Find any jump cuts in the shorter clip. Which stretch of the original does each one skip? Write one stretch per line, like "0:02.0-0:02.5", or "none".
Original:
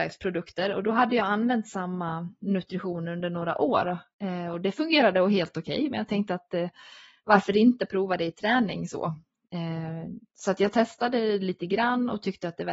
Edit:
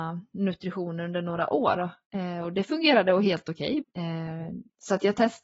0:05.9-0:09.4